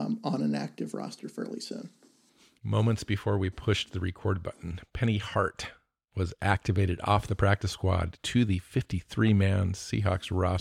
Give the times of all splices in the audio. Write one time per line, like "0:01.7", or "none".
none